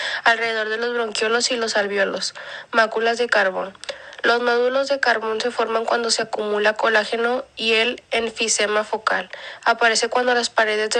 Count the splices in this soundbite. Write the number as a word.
zero